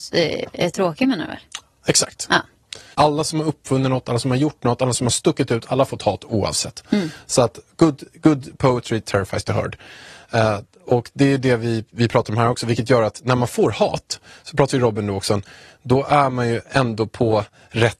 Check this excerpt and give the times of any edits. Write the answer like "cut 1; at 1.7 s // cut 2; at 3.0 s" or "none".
cut 1; at 2.9 s